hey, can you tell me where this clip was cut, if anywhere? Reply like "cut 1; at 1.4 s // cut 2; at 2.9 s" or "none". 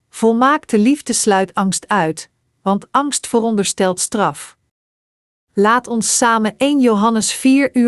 cut 1; at 5.3 s